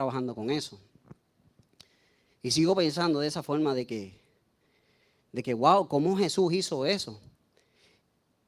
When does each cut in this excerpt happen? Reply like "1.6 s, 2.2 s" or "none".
none